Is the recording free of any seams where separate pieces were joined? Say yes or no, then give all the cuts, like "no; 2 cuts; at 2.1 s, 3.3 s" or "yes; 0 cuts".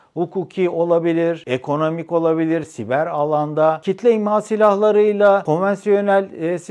no; 1 cut; at 2.6 s